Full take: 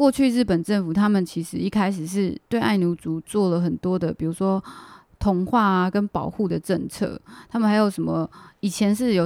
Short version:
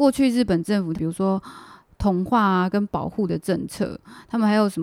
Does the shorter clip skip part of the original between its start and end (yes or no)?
yes